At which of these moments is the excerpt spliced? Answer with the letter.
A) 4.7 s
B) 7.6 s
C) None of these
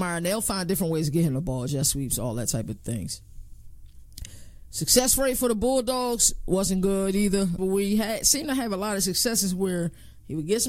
B